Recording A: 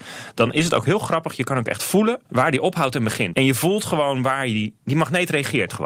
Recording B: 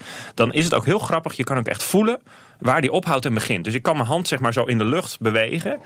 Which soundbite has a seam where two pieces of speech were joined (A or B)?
A